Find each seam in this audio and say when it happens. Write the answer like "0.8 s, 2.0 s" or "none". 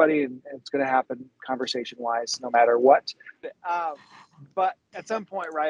3.4 s